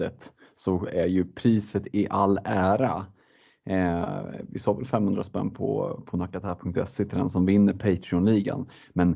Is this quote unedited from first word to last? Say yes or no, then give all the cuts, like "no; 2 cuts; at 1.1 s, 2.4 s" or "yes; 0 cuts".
yes; 0 cuts